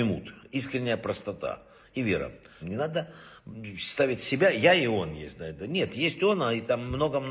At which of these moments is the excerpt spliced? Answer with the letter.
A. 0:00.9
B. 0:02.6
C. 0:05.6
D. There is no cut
B